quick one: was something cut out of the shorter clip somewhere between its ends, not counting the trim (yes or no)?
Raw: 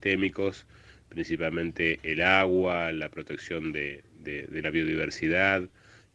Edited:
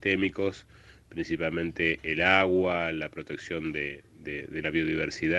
no